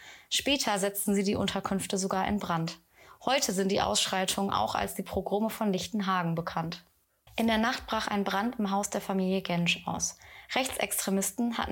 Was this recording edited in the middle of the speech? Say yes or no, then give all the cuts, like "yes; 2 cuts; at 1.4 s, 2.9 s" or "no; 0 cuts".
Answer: yes; 1 cut; at 7.3 s